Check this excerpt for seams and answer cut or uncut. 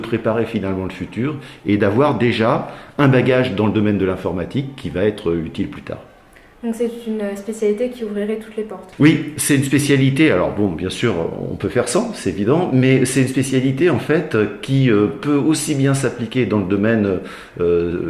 uncut